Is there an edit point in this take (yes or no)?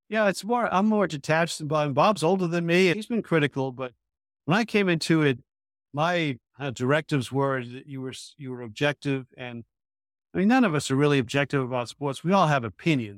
yes